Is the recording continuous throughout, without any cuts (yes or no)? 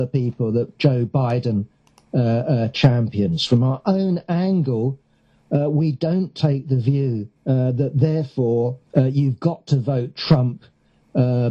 no